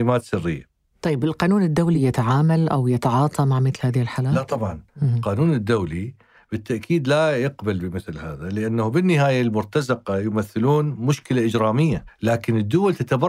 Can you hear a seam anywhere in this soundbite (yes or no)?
no